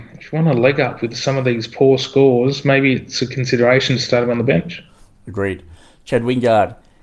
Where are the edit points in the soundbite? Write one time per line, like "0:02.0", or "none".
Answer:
none